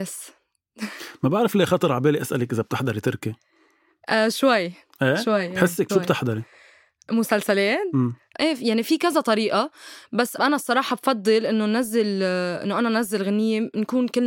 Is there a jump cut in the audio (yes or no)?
yes